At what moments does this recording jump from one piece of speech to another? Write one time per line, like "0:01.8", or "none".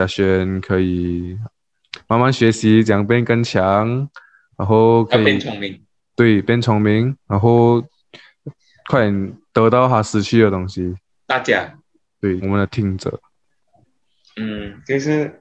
0:11.1
0:12.4